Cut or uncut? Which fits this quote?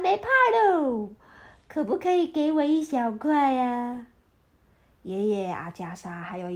uncut